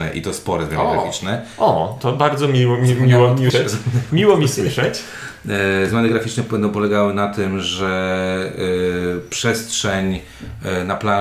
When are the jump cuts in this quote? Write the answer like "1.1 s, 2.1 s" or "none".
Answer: 3.5 s